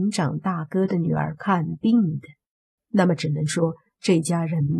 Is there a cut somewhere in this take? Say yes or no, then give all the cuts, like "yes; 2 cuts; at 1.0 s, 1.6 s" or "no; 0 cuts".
yes; 1 cut; at 2.8 s